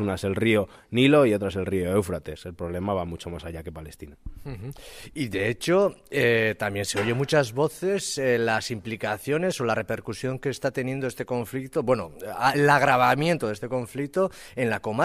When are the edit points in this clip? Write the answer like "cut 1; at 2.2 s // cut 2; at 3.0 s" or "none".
none

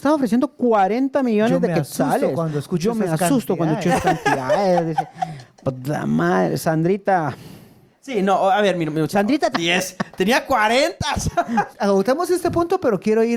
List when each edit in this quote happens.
cut 1; at 9.5 s // cut 2; at 11.7 s

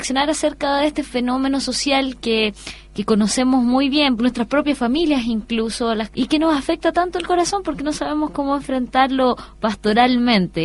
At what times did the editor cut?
cut 1; at 4.2 s // cut 2; at 6.1 s

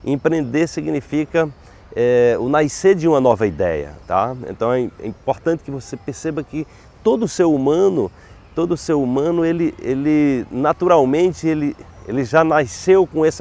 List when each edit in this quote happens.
none

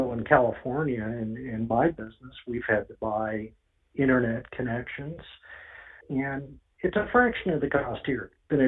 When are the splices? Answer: cut 1; at 6.0 s

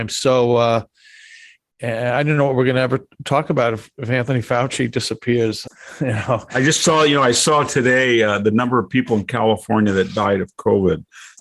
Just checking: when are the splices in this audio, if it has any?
none

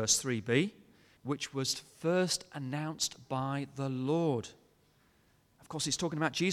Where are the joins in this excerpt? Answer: cut 1; at 1.2 s

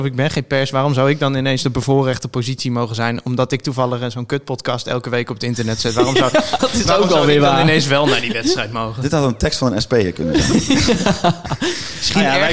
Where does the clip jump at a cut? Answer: cut 1; at 6.6 s

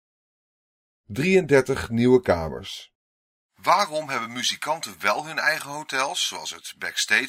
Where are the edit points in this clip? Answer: none

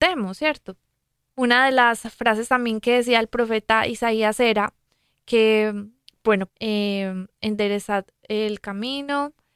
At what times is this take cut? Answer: cut 1; at 1.3 s // cut 2; at 6.5 s

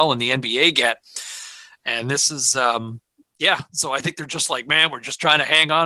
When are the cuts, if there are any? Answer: none

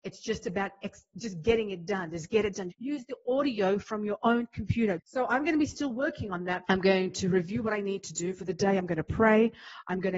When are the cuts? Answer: cut 1; at 2.7 s // cut 2; at 5.0 s // cut 3; at 6.6 s

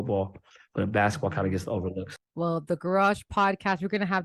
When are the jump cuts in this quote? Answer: cut 1; at 2.2 s

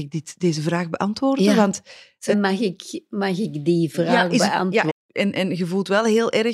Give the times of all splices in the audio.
cut 1; at 2.3 s // cut 2; at 4.9 s

